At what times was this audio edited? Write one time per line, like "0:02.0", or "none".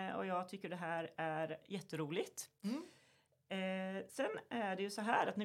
none